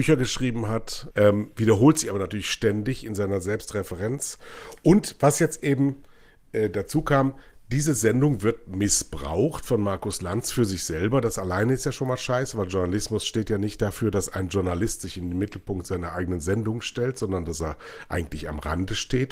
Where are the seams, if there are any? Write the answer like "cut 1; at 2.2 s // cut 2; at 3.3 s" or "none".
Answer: cut 1; at 1.1 s